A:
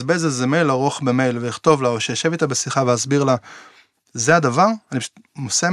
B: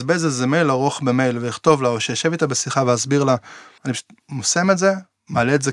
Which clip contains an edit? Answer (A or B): B